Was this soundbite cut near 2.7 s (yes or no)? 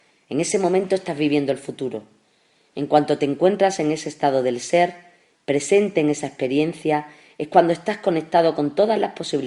no